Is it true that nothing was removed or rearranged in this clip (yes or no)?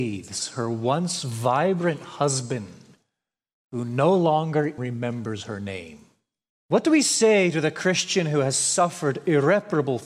no